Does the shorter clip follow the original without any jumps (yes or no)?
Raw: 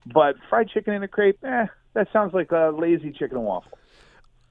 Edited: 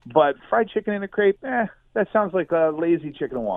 yes